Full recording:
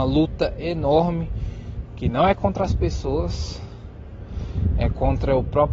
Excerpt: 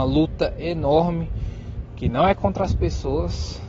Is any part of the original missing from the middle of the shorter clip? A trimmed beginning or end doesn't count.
no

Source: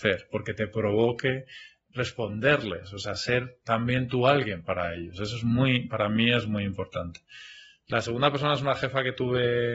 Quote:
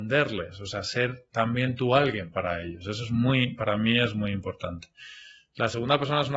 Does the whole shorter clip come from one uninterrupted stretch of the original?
yes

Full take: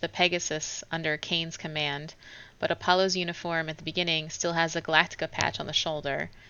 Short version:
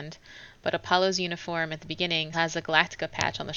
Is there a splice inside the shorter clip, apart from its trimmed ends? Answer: yes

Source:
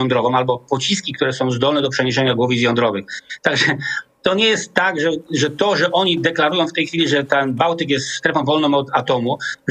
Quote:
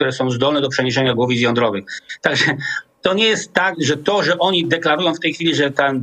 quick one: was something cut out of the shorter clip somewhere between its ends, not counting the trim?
yes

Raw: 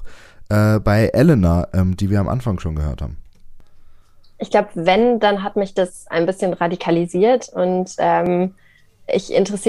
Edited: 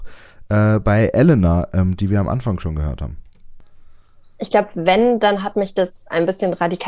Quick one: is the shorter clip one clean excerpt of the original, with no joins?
yes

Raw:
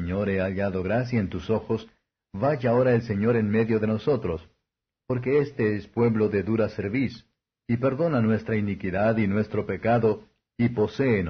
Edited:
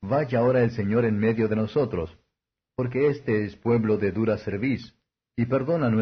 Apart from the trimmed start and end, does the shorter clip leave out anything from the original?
no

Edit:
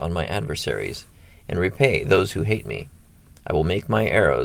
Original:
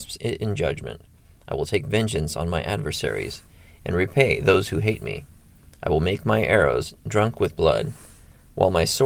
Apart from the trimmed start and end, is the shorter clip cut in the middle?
no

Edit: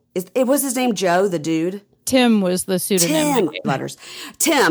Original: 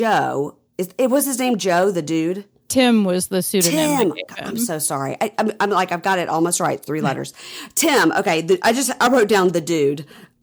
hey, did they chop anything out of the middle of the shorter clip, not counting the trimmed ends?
yes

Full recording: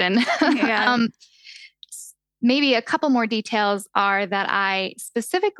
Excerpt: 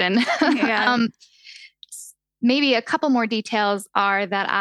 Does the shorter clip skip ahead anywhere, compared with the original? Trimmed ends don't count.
no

